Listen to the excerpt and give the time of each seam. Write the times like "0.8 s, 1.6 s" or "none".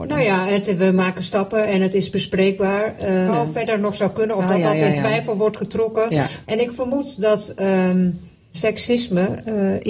3.3 s, 6.4 s, 8.5 s